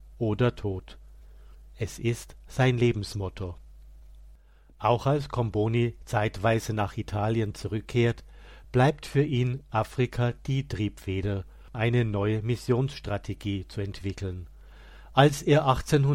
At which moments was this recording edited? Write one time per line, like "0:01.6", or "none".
0:11.7

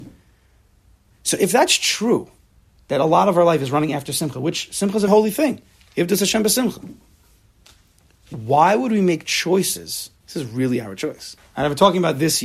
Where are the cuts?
0:05.1
0:10.2
0:11.4

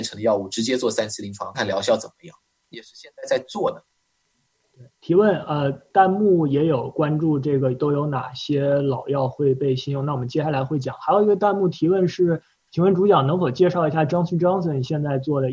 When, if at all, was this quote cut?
0:01.5

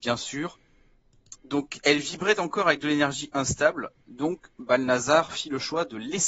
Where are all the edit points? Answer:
0:01.3

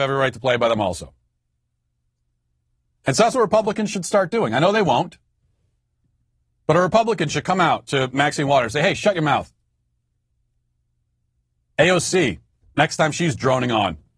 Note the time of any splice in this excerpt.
none

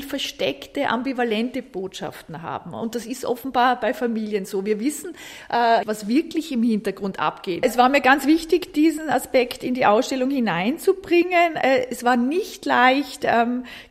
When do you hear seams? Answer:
0:05.8
0:07.6

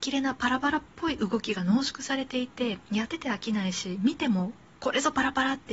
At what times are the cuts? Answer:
0:03.1

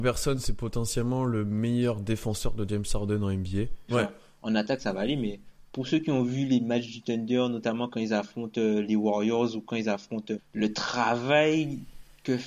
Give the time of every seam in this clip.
0:03.9
0:10.4

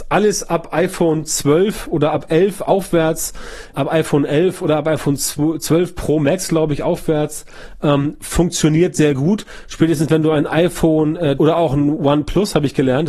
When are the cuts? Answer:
0:03.7
0:11.4

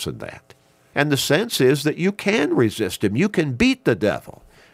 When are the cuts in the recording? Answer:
0:00.9

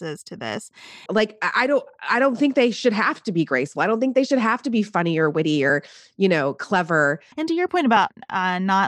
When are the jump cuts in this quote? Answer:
0:01.1
0:07.3

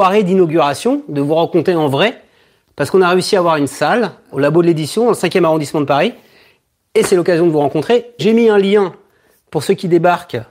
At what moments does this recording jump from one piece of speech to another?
0:04.3
0:08.2

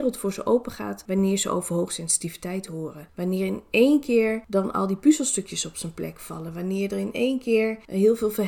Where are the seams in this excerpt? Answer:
none

